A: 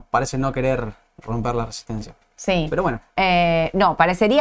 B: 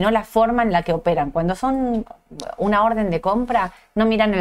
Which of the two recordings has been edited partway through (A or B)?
A